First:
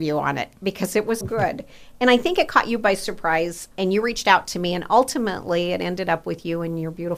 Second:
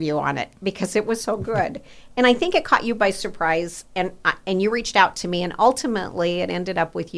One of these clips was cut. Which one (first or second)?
first